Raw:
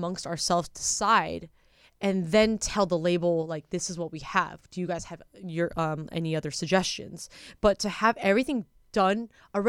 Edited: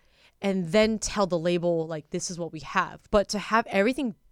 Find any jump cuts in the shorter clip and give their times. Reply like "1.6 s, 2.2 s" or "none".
3.1 s